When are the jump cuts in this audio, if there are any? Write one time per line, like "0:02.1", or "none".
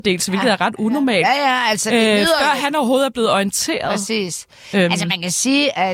none